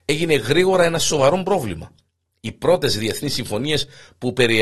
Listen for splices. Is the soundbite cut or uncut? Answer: uncut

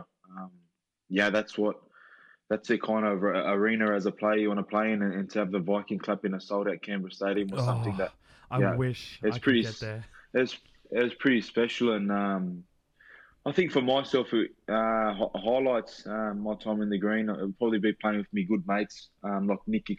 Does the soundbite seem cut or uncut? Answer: uncut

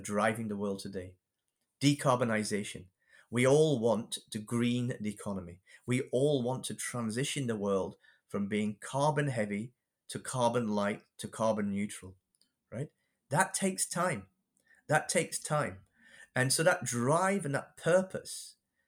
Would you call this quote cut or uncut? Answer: uncut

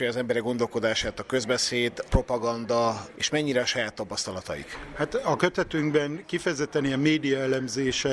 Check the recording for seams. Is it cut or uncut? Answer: uncut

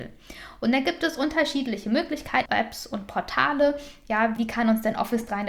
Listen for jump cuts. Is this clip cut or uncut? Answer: cut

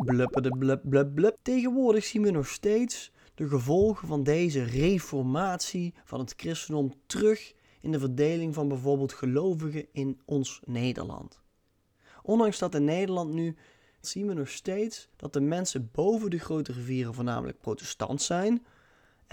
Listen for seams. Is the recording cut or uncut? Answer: cut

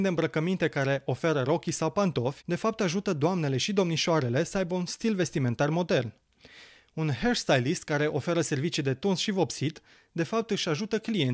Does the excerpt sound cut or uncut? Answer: uncut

